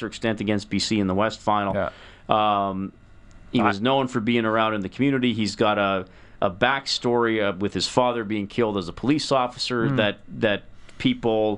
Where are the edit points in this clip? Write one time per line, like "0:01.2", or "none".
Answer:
none